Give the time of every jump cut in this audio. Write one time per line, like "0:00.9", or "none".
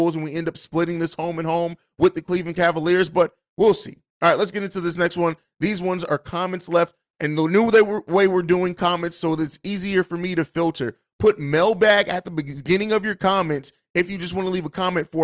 none